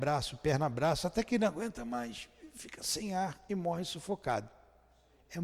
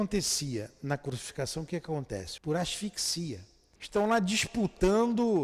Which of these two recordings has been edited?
second; 2 cuts; at 2.4 s, 3.8 s

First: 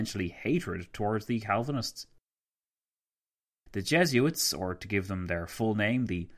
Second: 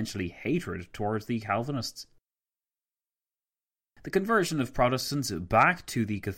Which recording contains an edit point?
first; 1 cut; at 3.7 s

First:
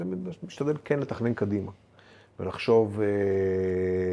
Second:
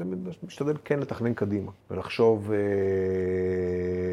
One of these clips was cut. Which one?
second; 1 cut; at 1.8 s

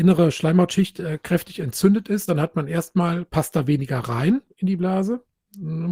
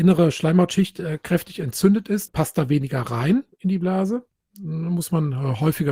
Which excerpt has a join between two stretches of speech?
second; 1 cut; at 2.3 s

